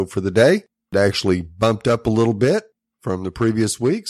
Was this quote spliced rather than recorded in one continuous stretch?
no; 0 cuts

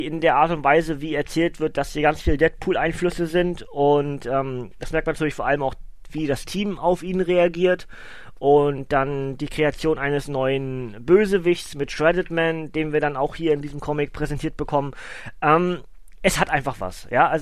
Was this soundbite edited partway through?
no; 0 cuts

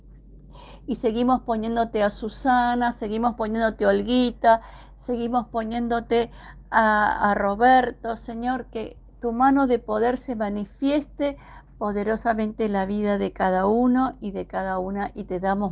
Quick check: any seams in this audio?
no; 0 cuts

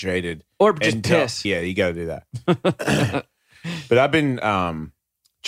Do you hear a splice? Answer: yes; 1 cut; at 1.4 s

